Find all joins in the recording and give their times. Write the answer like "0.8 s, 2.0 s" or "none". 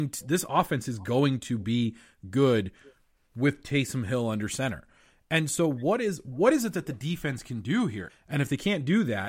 8.1 s